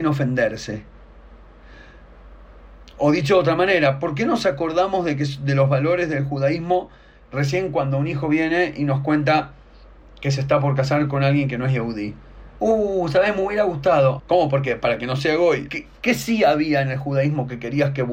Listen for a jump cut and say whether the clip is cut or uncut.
cut